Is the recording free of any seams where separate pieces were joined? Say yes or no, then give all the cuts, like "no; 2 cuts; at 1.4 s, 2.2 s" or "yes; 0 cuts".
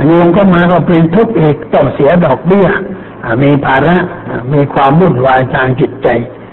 yes; 0 cuts